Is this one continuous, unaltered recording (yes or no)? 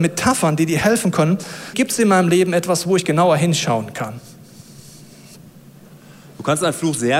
no